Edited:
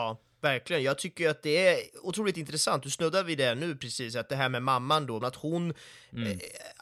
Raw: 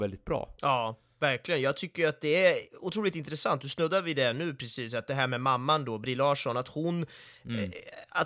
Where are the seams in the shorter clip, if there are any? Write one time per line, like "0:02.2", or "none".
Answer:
0:05.2